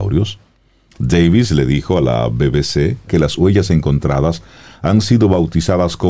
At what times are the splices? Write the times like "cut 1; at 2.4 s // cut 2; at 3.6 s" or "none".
cut 1; at 3.1 s